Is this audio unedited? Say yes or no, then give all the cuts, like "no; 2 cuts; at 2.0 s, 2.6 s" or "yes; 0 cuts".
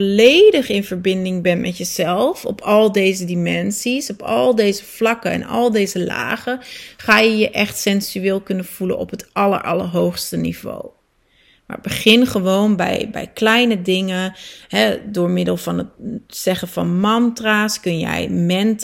yes; 0 cuts